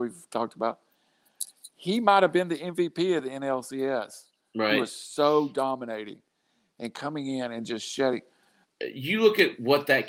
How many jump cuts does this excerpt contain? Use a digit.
1